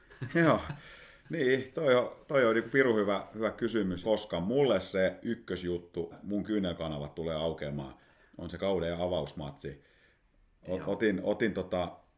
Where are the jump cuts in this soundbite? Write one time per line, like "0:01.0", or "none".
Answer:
0:04.0
0:06.1